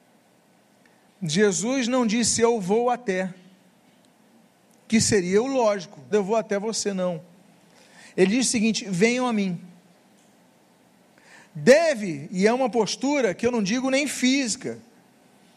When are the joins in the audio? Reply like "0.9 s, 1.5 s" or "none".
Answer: 6.1 s

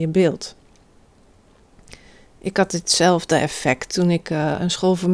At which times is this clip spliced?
none

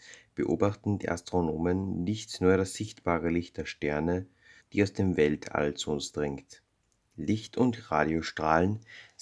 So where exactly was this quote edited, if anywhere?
4.6 s

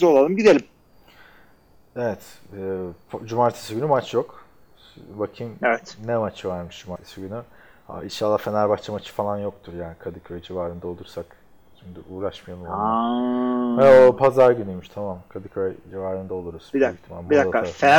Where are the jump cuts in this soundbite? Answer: none

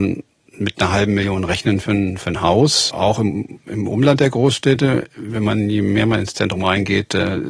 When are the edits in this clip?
none

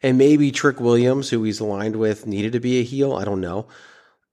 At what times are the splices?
none

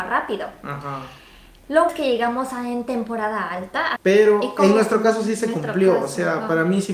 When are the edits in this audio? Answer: 1.9 s, 4.0 s

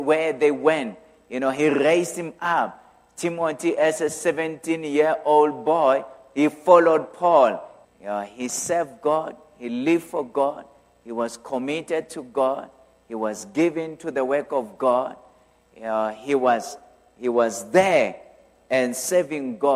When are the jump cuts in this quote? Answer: 7.8 s

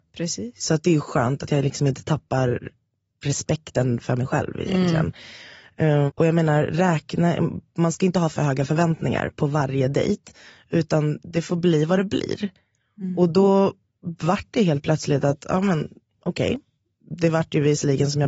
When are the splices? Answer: 6.1 s

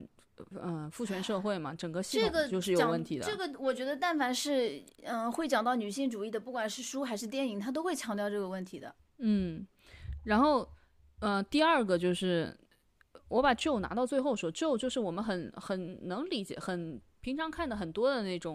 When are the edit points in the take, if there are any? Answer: none

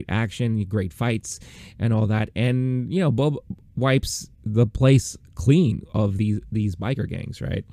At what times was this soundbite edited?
none

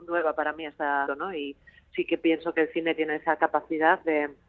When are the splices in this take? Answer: 1.1 s

